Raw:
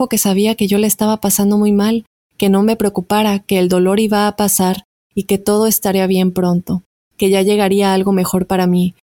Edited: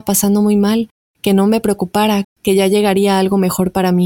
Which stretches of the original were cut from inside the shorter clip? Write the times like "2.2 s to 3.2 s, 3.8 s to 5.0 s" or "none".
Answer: 3.4 s to 7.0 s